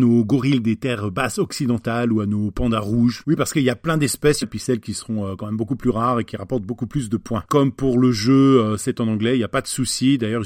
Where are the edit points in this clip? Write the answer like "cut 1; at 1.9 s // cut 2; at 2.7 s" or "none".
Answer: cut 1; at 4.4 s // cut 2; at 7.5 s